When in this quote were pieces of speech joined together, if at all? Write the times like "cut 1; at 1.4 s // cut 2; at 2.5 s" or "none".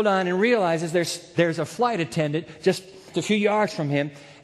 cut 1; at 3.1 s